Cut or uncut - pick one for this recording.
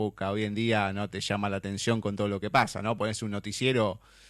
uncut